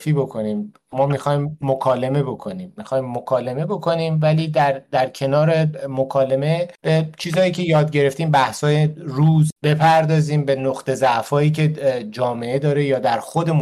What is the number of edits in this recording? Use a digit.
2